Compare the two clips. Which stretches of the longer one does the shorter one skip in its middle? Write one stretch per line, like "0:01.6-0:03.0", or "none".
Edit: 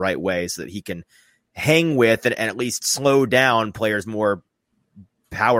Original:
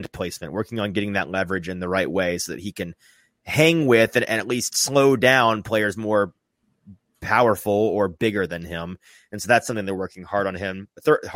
none